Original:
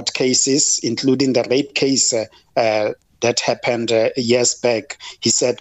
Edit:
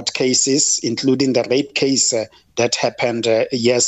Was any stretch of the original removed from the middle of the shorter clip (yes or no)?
yes